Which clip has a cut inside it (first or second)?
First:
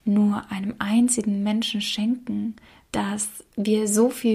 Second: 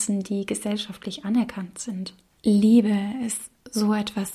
first